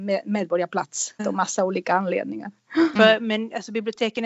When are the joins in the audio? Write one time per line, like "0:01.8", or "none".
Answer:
0:01.2
0:03.0